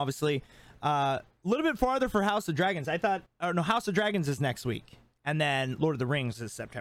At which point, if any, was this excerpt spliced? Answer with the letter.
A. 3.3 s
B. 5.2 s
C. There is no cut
A